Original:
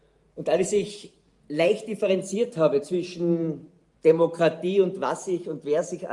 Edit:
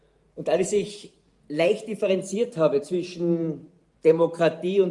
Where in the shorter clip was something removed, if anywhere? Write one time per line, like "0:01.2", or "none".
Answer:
none